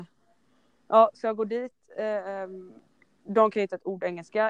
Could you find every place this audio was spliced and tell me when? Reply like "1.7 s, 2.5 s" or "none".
none

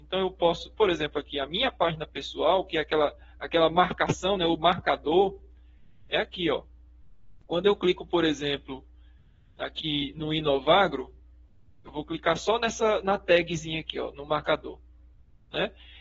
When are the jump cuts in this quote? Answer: 13.0 s

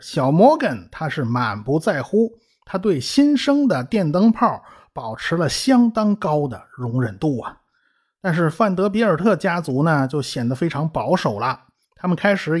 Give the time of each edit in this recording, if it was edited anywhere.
none

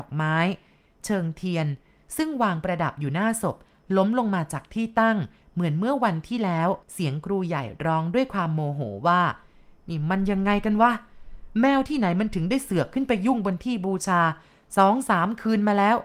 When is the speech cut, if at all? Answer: 6.8 s

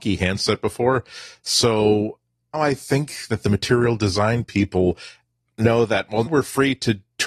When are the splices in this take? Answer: 2.5 s, 6.3 s

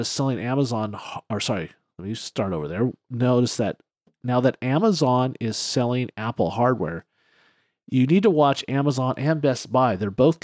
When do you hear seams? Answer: none

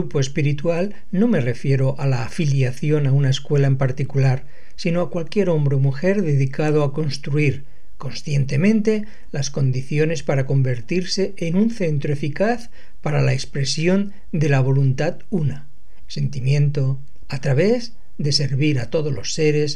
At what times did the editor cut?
16.0 s, 17.3 s

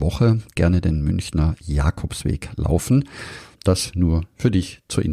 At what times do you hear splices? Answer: 3.5 s

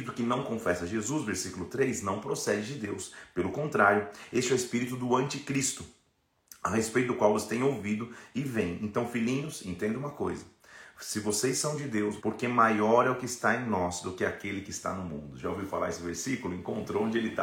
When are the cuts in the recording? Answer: 12.2 s

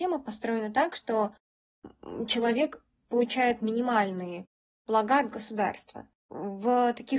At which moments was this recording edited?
none

